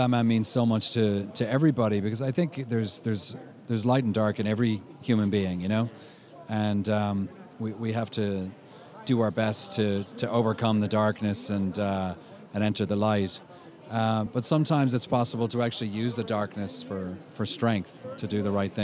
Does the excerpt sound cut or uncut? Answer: uncut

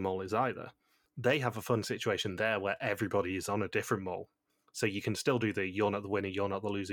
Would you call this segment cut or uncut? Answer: uncut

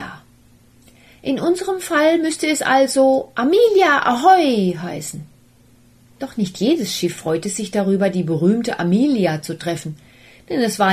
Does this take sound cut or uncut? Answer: uncut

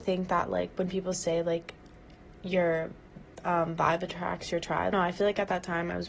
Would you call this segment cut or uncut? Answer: cut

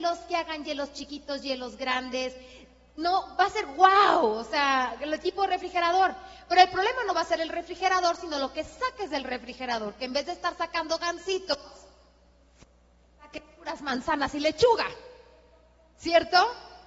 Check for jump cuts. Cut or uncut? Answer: uncut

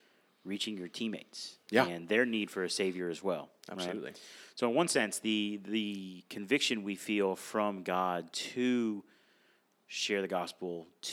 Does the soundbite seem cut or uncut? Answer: uncut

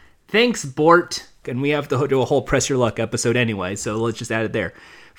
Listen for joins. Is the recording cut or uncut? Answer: cut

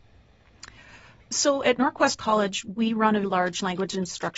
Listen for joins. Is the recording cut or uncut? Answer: cut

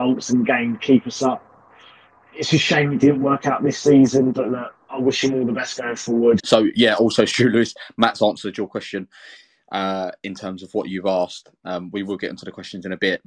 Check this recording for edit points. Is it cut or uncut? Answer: cut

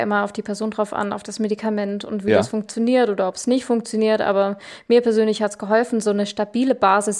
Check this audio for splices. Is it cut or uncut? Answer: uncut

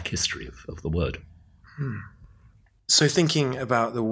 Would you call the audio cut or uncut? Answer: uncut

